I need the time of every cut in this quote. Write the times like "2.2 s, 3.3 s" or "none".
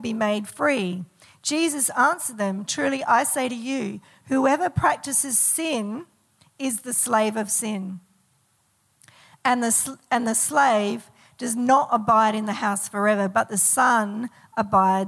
2.7 s